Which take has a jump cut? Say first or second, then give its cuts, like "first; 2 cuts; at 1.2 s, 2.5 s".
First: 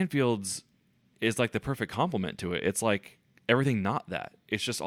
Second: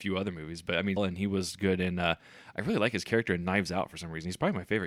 second; 1 cut; at 1.0 s